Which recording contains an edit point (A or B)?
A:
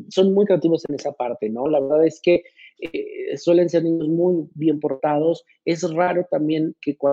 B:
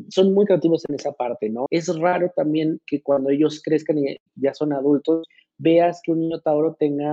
B